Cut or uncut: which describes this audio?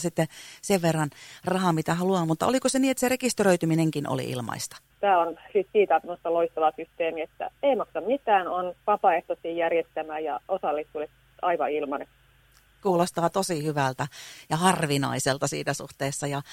cut